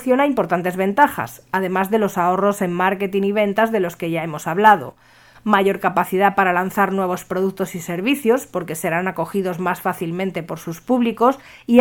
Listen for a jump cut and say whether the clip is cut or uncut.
cut